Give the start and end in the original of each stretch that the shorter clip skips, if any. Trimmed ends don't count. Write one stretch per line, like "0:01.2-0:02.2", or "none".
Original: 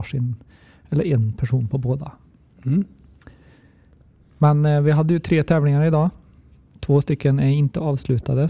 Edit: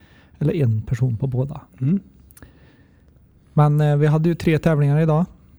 0:02.2-0:02.5